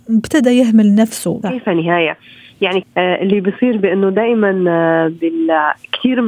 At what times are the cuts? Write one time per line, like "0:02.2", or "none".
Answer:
0:01.4
0:02.8

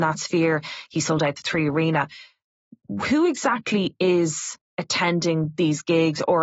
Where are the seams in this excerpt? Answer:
none

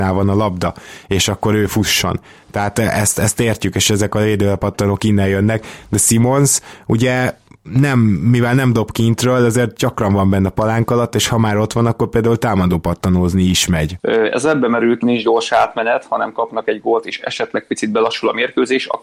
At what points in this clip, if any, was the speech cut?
0:14.0
0:15.0

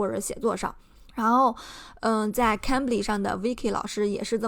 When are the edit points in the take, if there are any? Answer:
0:01.1

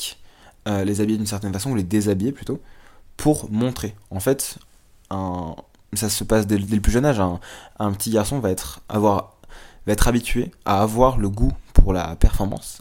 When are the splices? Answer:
0:06.6

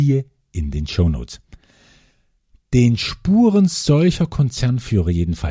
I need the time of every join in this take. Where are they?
none

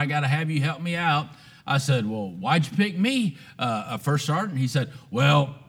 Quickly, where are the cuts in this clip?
none

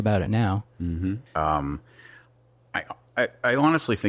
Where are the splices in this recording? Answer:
0:01.3

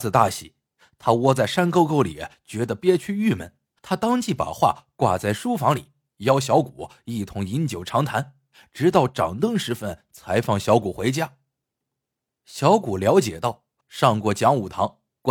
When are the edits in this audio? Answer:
0:03.8
0:13.8

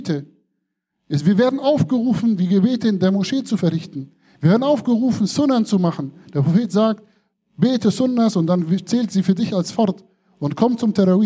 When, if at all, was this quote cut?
none

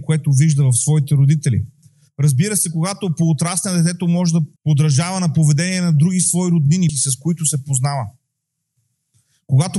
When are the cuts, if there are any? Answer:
0:04.6
0:06.9

